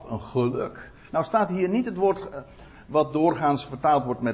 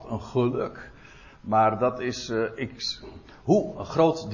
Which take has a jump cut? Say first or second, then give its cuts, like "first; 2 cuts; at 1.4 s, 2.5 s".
first; 1 cut; at 1.1 s